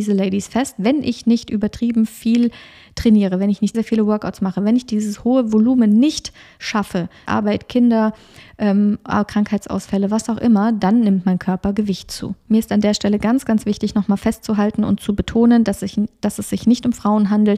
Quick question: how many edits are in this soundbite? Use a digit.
2